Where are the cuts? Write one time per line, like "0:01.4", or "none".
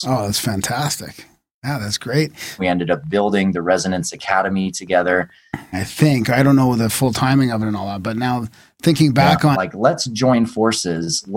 0:02.6
0:05.7
0:09.5